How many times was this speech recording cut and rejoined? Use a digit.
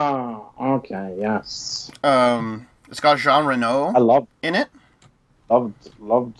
0